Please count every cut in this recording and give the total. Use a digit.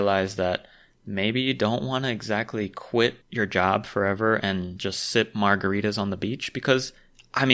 1